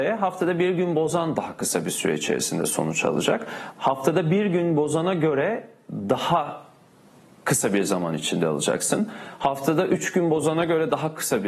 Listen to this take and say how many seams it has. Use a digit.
1